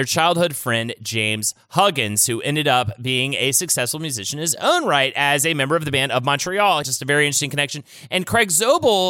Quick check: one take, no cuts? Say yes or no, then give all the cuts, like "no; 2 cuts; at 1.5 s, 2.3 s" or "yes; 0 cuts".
no; 1 cut; at 6.8 s